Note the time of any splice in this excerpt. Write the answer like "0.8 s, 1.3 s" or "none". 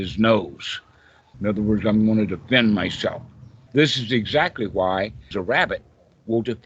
1.3 s, 3.7 s, 5.3 s